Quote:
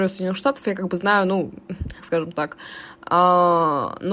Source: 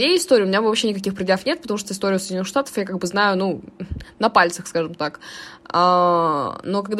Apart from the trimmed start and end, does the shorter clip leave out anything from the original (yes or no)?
yes